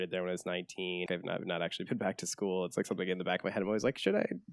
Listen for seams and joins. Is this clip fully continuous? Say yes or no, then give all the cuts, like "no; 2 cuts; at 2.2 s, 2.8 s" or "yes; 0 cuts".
no; 1 cut; at 1.1 s